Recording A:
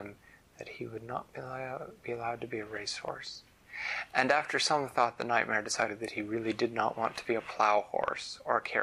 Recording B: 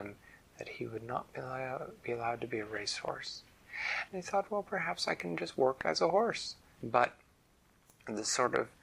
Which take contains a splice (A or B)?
B